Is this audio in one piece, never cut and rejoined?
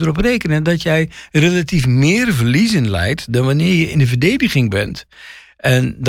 yes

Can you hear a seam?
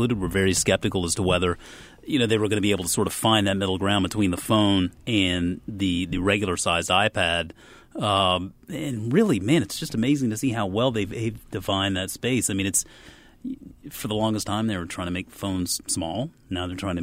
no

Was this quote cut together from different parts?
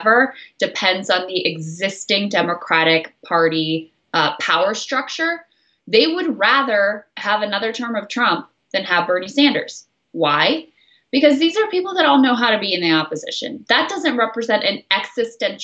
no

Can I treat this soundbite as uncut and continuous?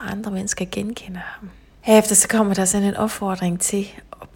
no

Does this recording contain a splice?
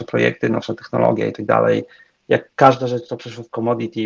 no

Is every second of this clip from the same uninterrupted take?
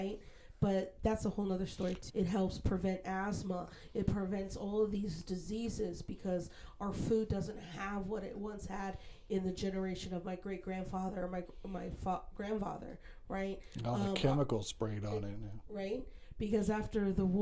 no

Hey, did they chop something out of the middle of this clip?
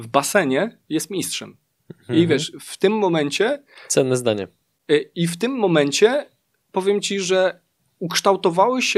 no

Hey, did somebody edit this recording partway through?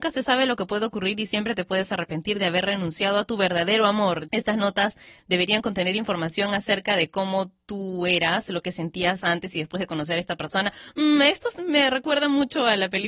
yes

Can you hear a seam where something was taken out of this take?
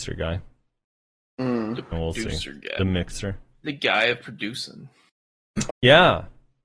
yes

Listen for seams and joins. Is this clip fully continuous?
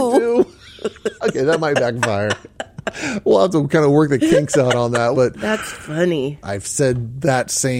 no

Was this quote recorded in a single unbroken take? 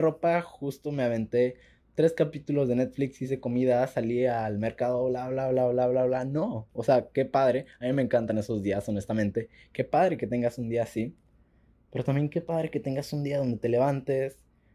yes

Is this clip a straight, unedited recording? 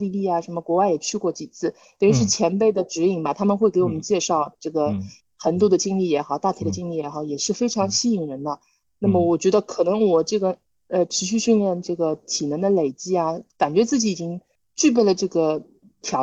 yes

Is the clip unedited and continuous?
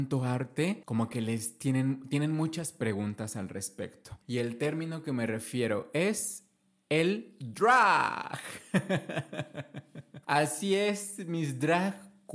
no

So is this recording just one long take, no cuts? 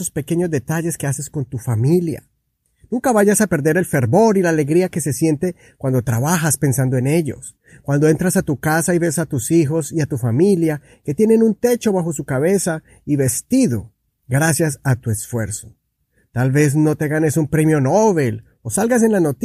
yes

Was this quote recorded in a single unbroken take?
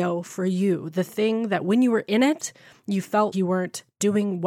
no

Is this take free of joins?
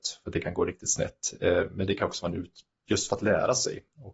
yes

